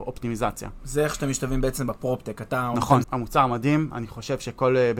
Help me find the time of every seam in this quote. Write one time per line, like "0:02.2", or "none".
0:03.0